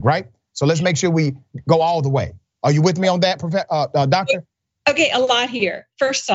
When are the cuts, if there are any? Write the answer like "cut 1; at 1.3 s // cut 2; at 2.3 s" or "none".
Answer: none